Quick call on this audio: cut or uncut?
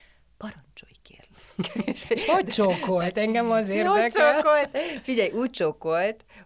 uncut